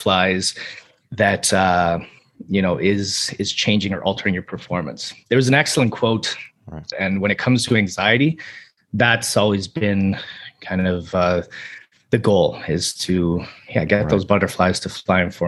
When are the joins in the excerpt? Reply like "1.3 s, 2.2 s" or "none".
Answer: 6.9 s